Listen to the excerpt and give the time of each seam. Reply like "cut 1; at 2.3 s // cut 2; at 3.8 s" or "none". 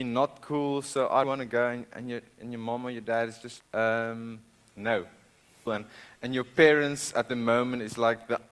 cut 1; at 1.2 s // cut 2; at 3.6 s // cut 3; at 5.7 s